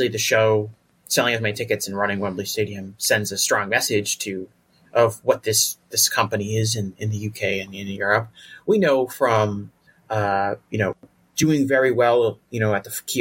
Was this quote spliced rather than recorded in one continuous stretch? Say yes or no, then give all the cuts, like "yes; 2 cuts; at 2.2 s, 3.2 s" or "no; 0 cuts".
no; 0 cuts